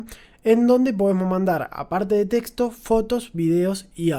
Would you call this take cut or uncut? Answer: uncut